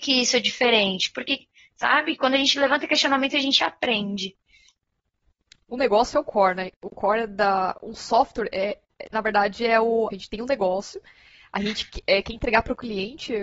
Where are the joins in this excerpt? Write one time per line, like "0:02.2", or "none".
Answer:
0:10.1